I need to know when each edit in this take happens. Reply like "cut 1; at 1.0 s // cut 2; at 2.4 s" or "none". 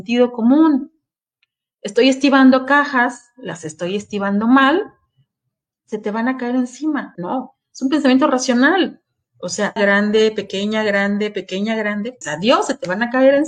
cut 1; at 7.1 s // cut 2; at 9.8 s // cut 3; at 12.2 s